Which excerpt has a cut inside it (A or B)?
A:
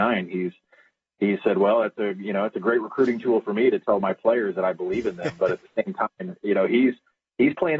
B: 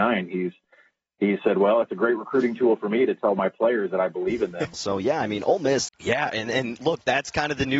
B